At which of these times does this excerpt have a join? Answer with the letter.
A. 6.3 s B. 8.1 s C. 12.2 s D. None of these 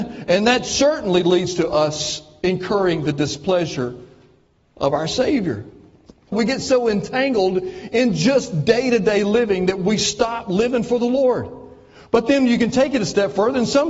A